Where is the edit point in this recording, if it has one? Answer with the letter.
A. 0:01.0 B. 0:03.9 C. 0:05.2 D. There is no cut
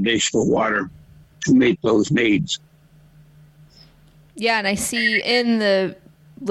C